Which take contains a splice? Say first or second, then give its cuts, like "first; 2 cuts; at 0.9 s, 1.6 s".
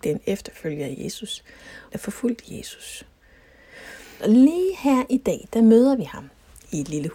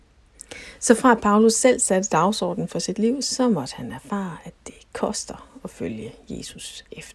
first; 2 cuts; at 1.9 s, 4.2 s